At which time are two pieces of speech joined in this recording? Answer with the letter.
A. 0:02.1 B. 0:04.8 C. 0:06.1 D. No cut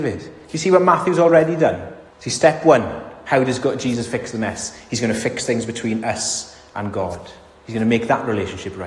A